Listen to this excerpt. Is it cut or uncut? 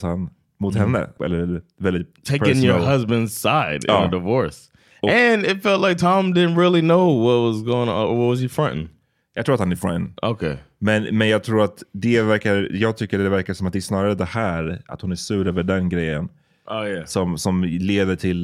cut